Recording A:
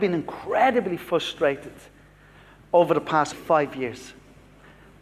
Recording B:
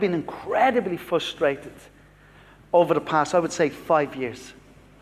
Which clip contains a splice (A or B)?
A